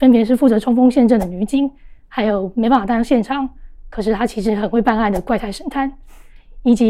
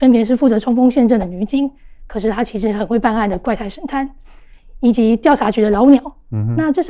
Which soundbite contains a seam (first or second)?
second